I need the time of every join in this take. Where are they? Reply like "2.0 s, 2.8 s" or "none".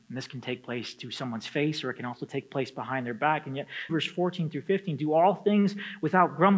3.9 s